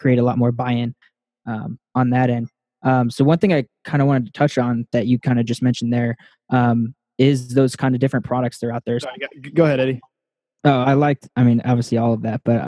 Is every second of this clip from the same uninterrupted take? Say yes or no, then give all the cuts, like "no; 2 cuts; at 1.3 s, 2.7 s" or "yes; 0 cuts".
no; 2 cuts; at 9.0 s, 10.8 s